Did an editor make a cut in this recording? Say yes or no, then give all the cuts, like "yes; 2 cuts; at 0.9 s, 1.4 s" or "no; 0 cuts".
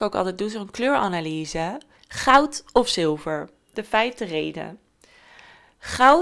yes; 1 cut; at 1.9 s